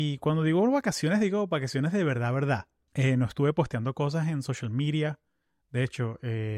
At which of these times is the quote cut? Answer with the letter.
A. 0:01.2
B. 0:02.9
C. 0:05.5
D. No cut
B